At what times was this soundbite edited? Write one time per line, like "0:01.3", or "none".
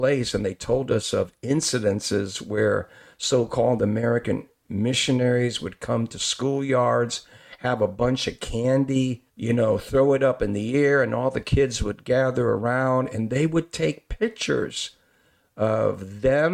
0:09.3